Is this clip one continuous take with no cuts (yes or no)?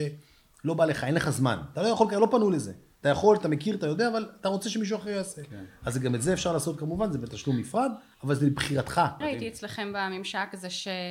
no